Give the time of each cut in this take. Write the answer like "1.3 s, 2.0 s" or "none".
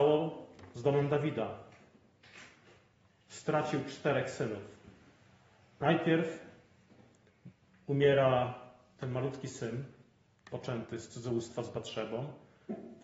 none